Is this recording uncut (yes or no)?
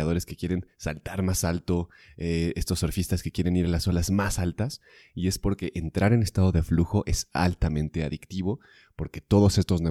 yes